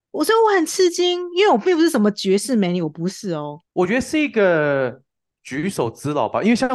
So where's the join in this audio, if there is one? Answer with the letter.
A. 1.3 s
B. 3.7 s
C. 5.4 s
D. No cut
B